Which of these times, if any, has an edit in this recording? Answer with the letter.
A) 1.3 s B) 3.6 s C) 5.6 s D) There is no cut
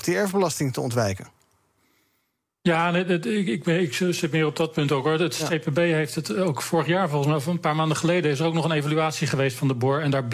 D